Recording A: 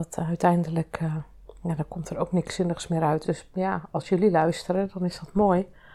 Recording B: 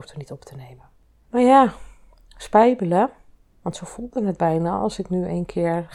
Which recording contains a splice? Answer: A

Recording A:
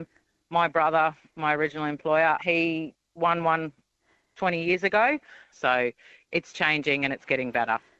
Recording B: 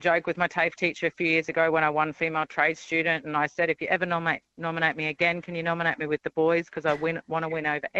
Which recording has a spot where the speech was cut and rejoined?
A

